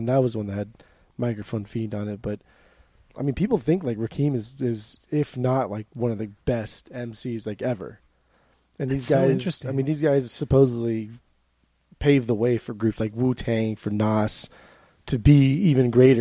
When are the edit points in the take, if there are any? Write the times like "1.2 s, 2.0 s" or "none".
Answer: none

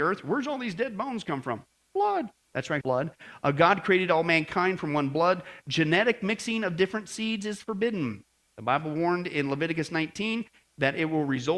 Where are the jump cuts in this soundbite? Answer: 2.8 s

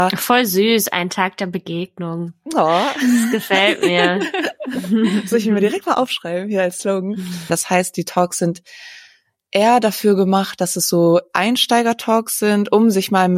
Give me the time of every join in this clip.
7.5 s

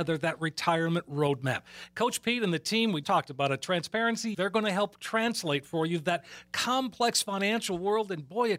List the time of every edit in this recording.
3.0 s, 4.3 s

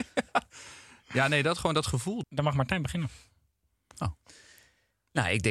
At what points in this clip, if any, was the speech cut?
2.2 s

